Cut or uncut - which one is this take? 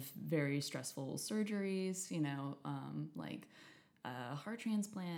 uncut